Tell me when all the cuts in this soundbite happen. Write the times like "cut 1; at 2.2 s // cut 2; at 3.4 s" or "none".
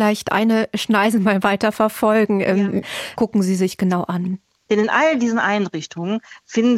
cut 1; at 3.2 s // cut 2; at 4.7 s